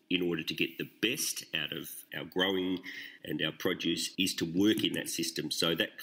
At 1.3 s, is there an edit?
no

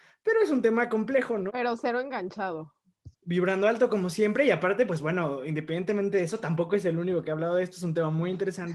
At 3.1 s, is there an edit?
yes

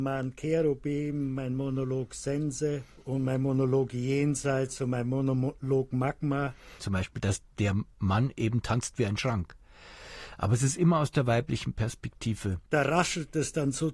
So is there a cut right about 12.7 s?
yes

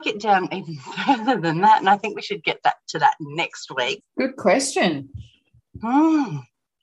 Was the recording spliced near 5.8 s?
no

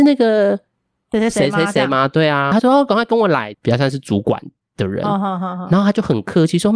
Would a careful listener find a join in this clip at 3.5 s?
yes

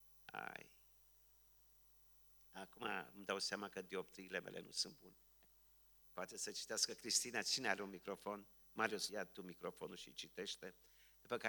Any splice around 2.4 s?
no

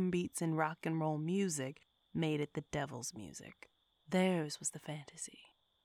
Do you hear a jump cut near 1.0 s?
no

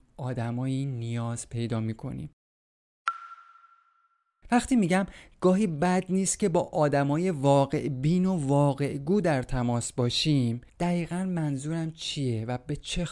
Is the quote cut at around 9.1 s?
no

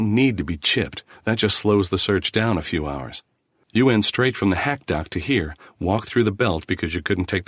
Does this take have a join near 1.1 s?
no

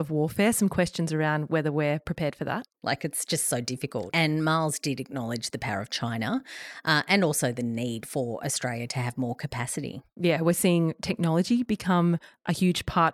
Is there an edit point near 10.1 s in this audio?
no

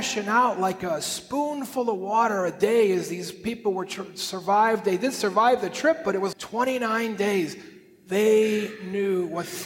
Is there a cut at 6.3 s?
yes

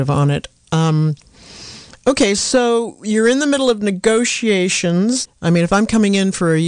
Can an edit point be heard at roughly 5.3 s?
yes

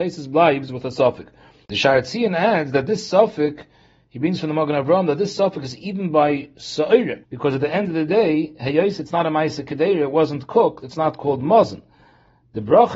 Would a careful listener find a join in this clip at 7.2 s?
yes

